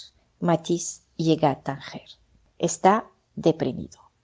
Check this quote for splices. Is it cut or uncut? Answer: uncut